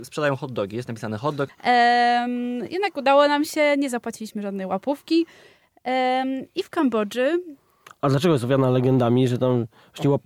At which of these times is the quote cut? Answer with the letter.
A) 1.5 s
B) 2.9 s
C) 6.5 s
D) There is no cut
A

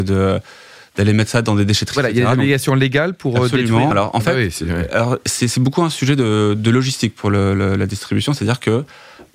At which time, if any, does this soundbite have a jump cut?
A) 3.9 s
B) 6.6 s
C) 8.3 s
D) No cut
A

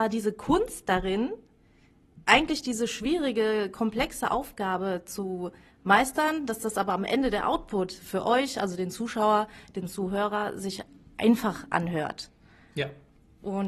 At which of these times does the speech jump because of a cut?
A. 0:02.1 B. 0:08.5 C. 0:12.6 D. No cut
D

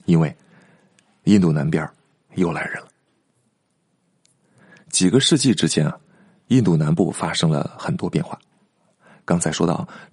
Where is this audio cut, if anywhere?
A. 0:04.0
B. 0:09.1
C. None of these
C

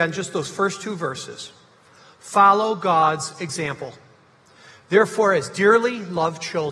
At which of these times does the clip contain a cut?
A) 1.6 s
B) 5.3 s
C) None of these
C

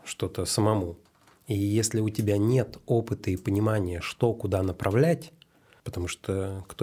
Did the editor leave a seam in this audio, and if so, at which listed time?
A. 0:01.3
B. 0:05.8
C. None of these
B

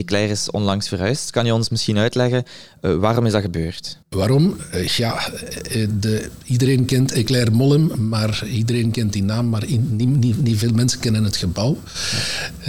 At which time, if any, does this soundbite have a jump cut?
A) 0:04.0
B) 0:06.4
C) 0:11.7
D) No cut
A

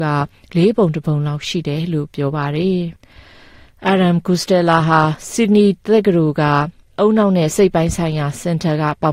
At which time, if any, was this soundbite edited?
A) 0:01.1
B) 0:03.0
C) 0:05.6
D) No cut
B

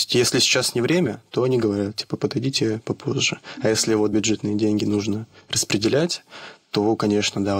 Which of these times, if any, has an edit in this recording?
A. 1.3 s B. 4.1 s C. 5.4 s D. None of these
B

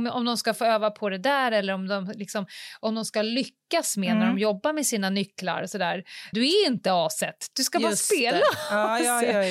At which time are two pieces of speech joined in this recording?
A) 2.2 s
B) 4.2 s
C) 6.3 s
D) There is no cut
C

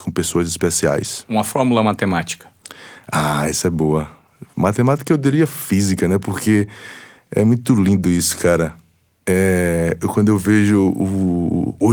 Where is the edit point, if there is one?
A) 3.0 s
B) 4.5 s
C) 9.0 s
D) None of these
D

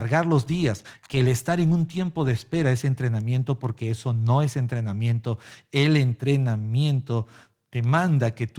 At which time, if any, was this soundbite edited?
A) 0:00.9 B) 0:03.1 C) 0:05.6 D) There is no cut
A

